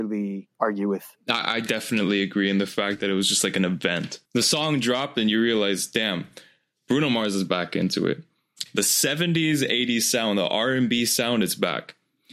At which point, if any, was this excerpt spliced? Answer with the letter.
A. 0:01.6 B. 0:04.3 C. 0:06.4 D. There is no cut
B